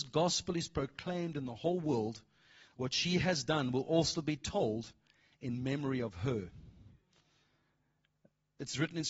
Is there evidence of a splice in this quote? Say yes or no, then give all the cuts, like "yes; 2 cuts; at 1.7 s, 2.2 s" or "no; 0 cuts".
no; 0 cuts